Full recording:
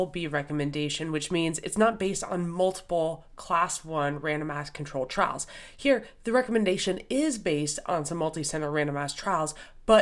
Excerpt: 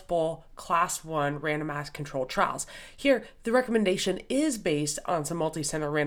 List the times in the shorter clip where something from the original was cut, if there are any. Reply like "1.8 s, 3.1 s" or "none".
none